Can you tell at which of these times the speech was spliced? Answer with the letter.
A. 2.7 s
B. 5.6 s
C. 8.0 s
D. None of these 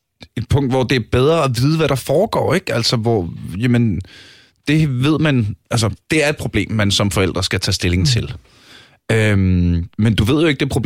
B